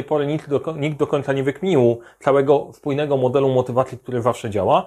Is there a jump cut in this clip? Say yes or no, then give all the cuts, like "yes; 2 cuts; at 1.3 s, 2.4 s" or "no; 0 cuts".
no; 0 cuts